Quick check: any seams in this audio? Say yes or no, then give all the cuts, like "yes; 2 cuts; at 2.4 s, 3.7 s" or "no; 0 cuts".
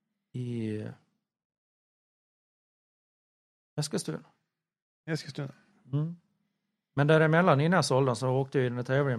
no; 0 cuts